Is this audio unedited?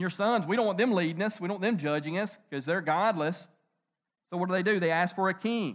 yes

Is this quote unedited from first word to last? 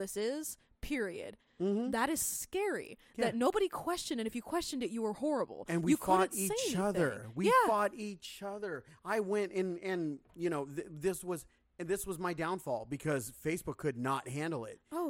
no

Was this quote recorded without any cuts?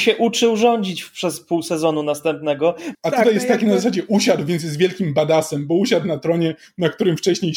no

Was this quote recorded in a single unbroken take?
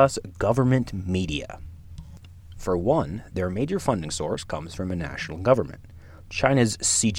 no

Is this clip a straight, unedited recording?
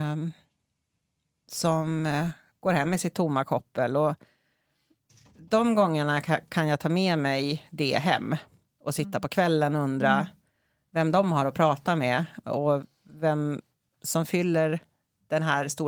yes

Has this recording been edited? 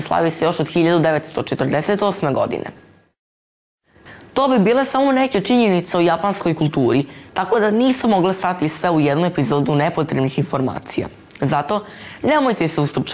yes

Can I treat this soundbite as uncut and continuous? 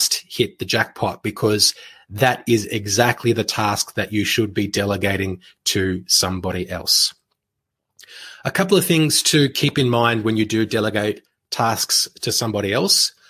yes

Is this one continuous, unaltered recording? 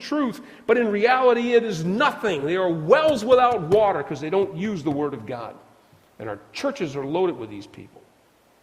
yes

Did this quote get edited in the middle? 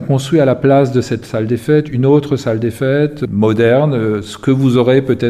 no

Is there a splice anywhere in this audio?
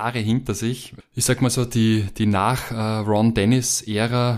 no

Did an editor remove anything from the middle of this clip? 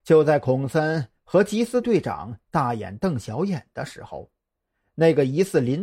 yes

